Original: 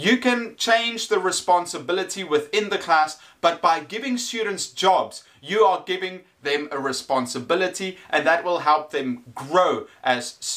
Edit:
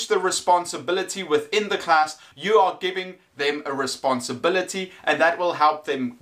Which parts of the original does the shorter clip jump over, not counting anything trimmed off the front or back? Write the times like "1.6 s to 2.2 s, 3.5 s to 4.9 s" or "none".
3.3 s to 5.4 s